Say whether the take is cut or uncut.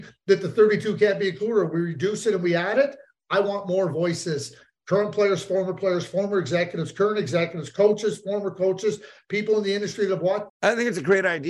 cut